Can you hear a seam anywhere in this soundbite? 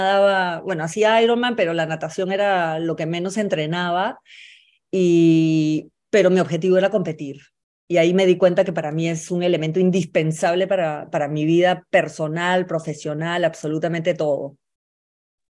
no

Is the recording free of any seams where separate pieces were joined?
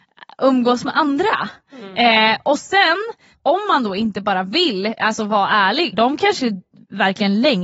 no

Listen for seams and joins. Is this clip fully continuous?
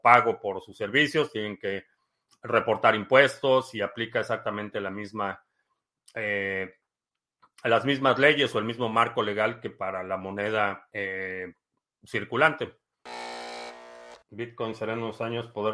yes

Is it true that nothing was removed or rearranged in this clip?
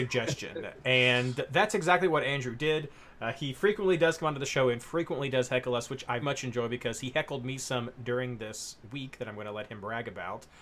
no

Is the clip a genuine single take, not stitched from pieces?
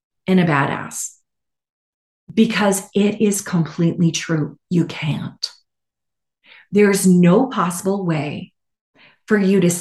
yes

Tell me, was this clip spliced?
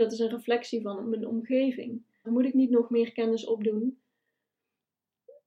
yes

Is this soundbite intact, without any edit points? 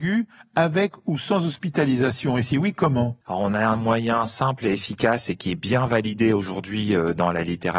no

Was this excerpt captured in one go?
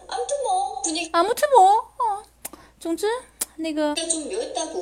no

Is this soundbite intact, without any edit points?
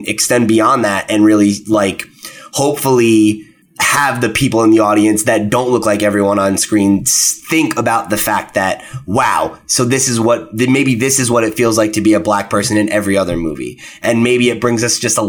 no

